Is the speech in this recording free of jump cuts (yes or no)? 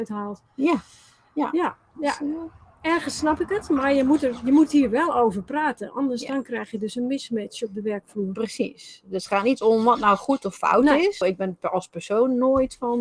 no